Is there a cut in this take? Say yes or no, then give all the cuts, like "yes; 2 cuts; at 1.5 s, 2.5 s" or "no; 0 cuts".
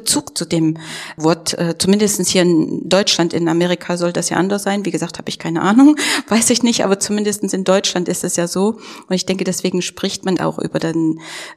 yes; 1 cut; at 10.4 s